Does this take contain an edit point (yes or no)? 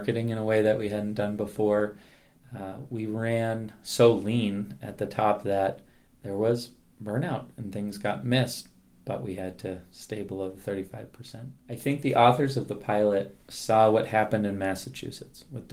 yes